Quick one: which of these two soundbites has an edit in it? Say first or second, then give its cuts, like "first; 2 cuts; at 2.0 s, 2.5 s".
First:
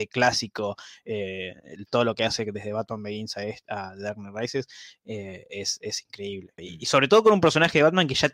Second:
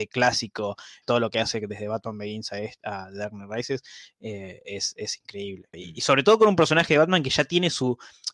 second; 1 cut; at 1.0 s